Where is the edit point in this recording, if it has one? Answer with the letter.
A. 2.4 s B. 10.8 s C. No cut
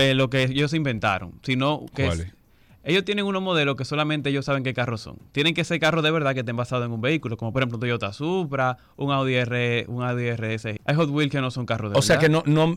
B